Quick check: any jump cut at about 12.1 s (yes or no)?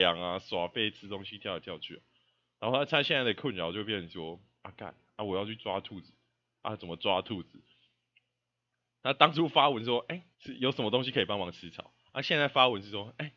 no